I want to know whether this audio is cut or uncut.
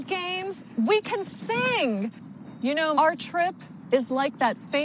cut